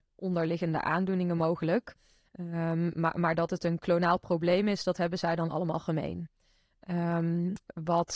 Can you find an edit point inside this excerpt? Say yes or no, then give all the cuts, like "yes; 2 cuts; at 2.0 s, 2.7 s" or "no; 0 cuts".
no; 0 cuts